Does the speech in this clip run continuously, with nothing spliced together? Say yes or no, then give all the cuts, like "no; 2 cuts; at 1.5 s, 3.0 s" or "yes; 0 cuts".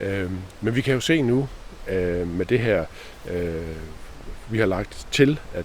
yes; 0 cuts